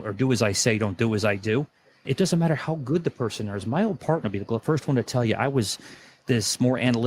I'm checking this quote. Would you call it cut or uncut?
cut